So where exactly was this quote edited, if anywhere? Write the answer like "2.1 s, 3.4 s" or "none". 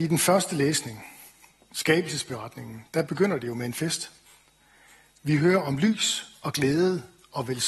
none